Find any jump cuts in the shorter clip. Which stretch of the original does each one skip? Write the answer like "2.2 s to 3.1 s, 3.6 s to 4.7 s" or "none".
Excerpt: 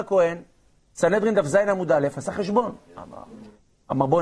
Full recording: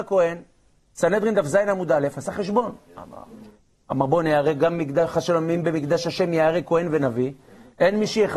none

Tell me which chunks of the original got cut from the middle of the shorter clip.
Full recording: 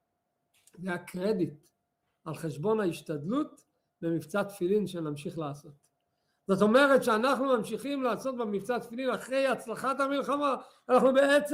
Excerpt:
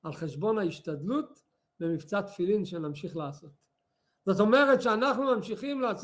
none

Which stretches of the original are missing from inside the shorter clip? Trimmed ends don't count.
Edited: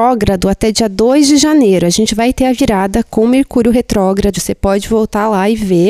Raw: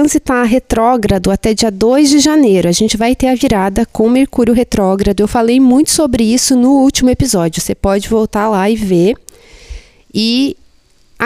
5.2 s to 7.5 s

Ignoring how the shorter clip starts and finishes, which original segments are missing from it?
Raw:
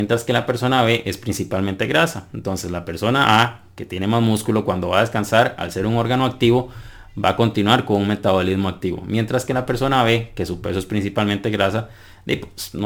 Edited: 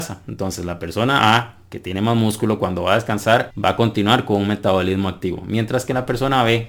5.6 s to 7.1 s

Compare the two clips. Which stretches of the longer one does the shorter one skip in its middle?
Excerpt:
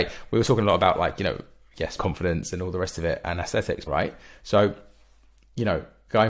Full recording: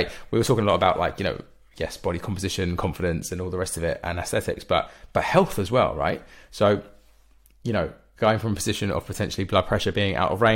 2.0 s to 2.8 s, 4.6 s to 5.9 s

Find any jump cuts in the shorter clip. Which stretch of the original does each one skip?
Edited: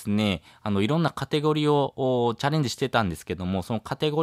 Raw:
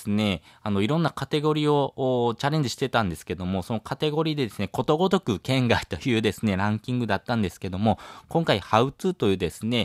none

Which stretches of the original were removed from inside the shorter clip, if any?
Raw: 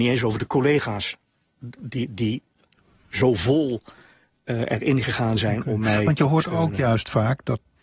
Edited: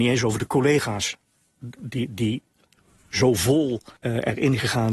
4.0 s to 4.4 s

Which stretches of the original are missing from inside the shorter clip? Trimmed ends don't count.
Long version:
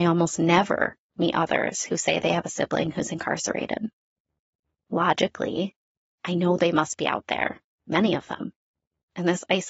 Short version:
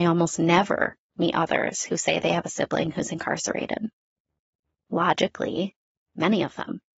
6.0 s to 7.8 s

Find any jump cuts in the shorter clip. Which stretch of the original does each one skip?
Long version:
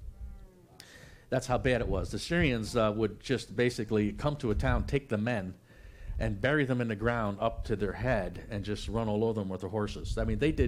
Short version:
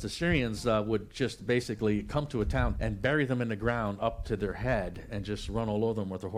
4.8 s to 6.1 s

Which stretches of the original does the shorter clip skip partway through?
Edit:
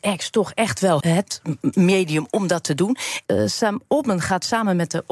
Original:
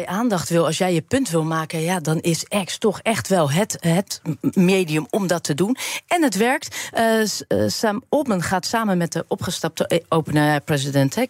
3.5 s to 3.8 s, 6.1 s to 7.5 s

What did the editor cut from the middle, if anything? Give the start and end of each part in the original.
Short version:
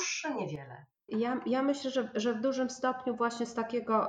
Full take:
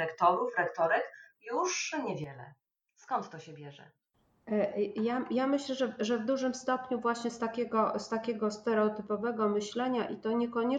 2.8 s to 4.9 s

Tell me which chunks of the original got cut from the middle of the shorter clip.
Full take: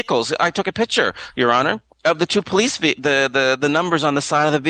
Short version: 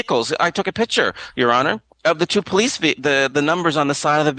3.3 s to 3.6 s

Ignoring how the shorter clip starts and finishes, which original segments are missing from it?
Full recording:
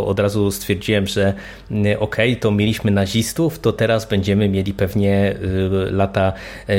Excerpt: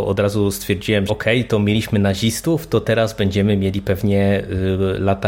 1.1 s to 2.0 s

